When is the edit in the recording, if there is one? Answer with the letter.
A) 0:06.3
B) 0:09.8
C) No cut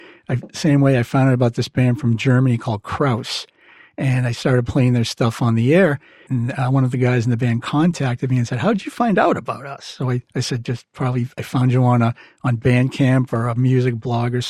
A